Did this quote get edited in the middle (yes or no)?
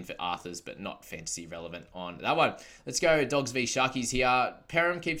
no